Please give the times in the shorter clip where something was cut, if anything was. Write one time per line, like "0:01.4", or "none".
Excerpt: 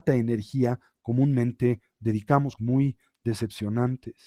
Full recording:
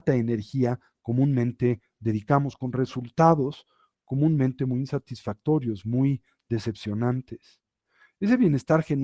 0:02.6